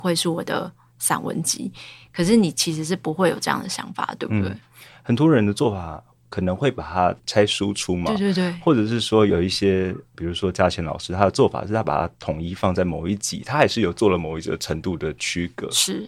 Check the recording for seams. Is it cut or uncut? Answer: uncut